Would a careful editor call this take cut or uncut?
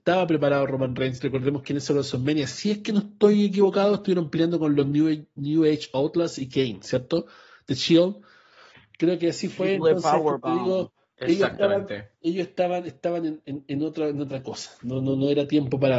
uncut